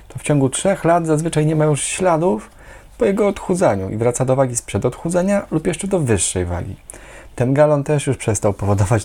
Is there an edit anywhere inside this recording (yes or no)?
yes